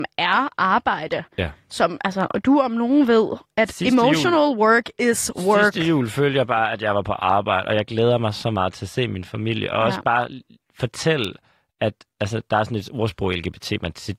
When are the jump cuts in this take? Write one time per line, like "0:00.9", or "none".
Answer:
none